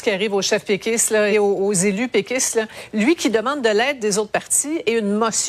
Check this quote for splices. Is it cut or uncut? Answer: cut